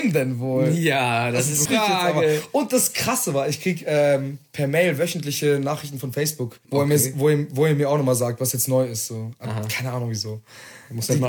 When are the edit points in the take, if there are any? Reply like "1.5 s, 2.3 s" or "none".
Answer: 1.7 s, 6.6 s